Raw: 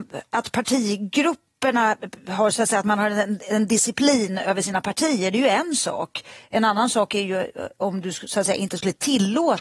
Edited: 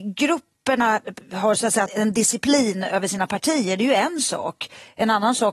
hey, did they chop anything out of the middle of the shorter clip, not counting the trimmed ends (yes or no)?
yes